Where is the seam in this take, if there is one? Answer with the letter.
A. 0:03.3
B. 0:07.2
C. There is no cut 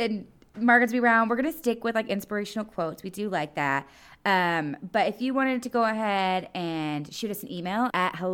C